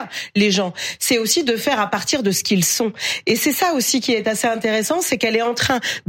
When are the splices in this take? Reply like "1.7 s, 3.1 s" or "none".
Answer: none